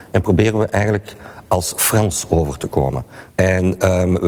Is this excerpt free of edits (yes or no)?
no